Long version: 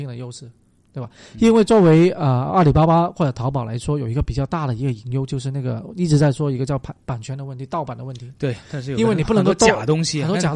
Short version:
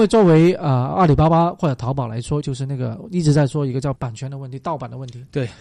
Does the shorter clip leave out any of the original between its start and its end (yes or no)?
yes